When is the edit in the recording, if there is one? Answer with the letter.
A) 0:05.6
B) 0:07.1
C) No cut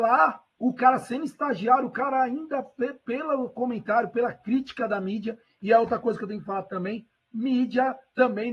C